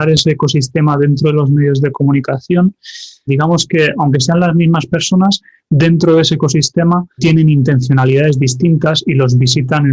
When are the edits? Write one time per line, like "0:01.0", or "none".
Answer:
0:03.3
0:07.2

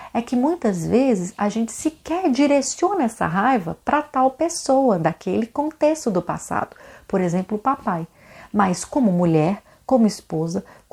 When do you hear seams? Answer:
none

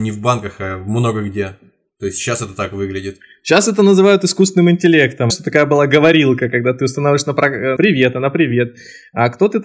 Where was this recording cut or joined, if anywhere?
0:05.3
0:07.8

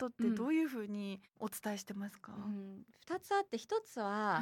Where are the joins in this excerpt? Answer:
none

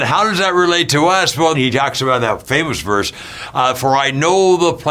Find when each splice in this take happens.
0:01.5

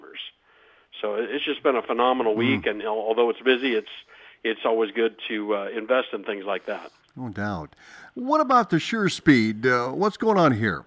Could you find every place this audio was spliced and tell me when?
none

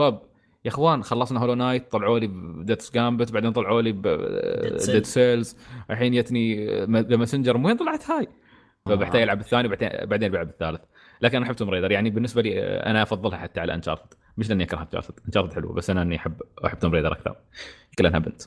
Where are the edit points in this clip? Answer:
0:08.9

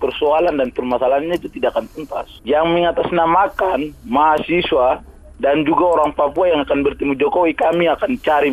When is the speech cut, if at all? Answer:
0:02.4

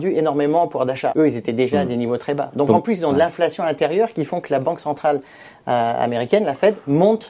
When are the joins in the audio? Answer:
0:01.1

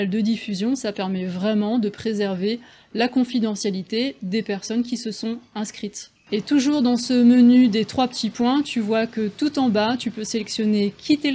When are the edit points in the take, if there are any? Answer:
none

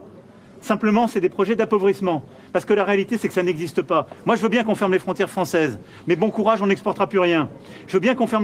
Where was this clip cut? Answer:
none

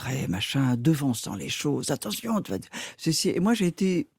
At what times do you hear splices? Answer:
none

